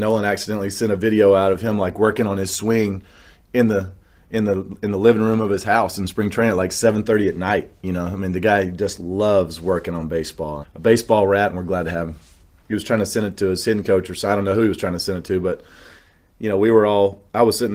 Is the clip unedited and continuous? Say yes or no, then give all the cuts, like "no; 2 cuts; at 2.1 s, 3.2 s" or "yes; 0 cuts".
no; 2 cuts; at 10.6 s, 12.6 s